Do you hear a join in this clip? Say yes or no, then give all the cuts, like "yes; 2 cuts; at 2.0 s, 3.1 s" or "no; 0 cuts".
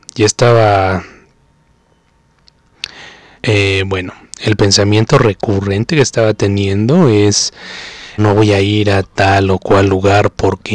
yes; 2 cuts; at 3.4 s, 8.2 s